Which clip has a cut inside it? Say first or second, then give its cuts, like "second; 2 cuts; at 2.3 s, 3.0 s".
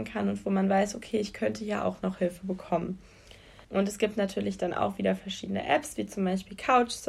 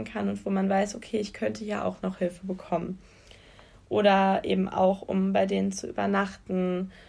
first; 1 cut; at 3.6 s